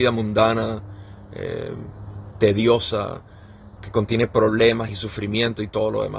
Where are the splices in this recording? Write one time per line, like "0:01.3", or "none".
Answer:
0:03.8